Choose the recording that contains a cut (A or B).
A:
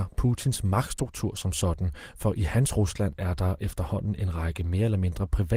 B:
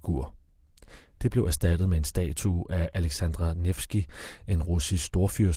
B